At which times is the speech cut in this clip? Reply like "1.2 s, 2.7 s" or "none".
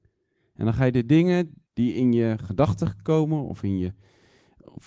1.7 s